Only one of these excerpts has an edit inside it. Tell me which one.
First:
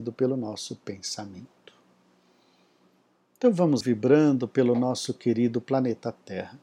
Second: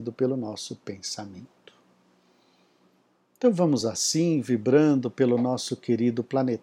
first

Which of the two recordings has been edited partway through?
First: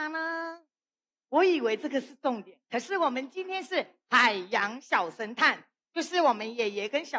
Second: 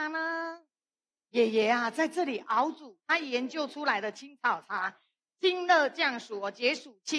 first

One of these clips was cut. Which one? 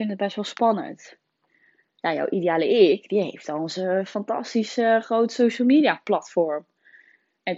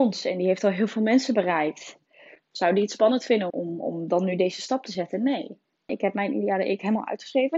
second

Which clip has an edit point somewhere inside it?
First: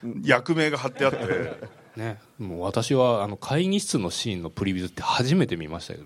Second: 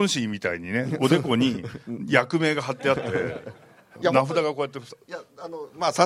first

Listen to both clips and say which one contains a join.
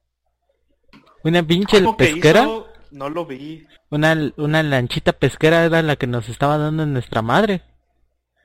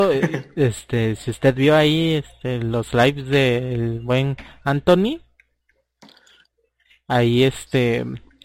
first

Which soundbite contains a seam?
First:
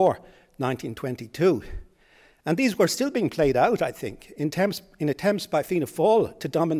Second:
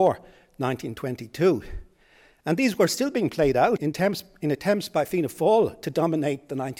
second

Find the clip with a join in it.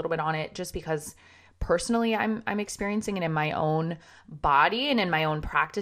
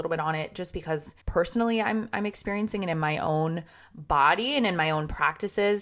second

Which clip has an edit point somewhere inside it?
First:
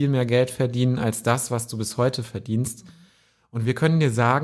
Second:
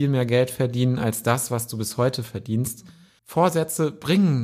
second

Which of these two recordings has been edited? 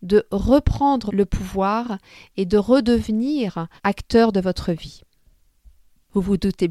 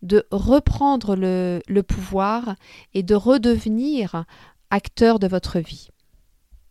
first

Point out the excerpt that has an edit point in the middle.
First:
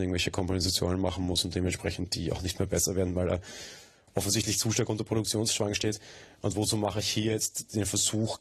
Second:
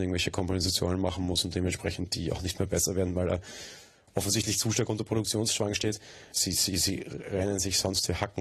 second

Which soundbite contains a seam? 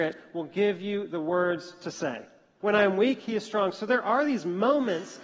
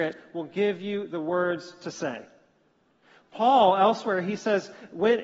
first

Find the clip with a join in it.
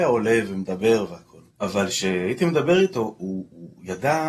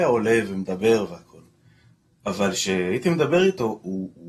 first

